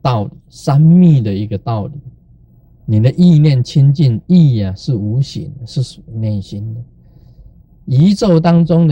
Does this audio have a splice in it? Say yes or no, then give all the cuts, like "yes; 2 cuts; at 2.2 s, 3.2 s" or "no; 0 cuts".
yes; 1 cut; at 2.8 s